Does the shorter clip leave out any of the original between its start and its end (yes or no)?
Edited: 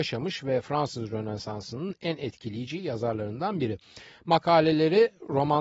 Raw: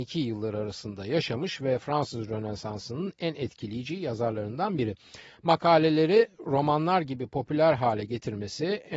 no